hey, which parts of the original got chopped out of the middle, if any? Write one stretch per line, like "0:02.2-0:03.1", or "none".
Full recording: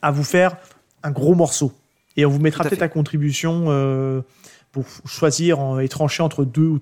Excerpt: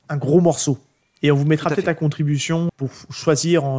0:03.6-0:04.6